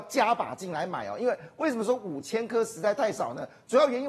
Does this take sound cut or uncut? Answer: uncut